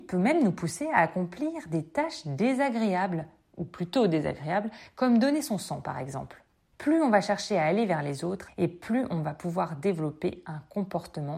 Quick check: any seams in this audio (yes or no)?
yes